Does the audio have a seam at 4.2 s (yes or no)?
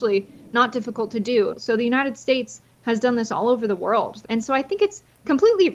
yes